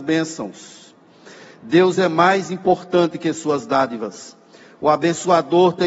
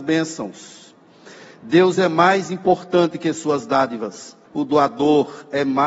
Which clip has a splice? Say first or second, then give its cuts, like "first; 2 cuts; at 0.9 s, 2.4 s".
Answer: second; 1 cut; at 4.5 s